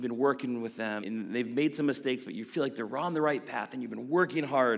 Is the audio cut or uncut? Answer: cut